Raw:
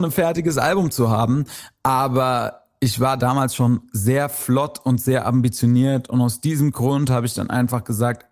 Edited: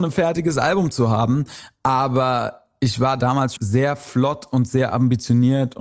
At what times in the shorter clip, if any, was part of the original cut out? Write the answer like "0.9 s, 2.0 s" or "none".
3.6 s